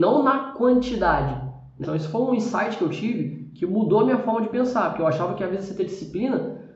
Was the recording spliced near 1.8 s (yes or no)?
yes